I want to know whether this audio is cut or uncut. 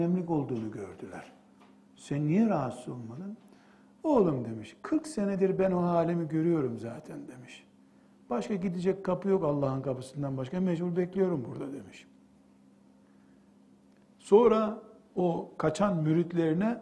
uncut